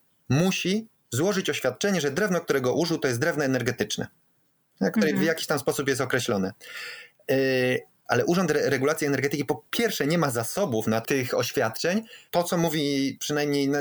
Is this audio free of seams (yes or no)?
no